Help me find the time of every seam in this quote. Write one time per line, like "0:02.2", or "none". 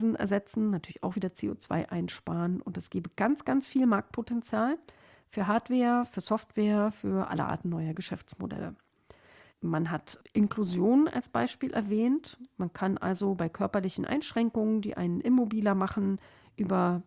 0:09.5